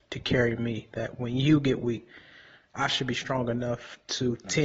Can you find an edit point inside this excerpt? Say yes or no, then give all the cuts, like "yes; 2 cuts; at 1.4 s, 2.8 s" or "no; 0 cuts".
no; 0 cuts